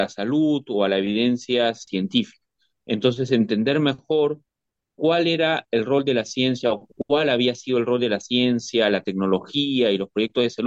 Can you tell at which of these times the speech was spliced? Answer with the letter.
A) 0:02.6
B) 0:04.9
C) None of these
B